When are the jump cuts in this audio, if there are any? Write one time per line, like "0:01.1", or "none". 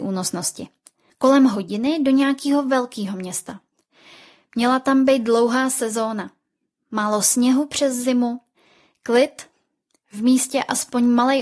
0:01.1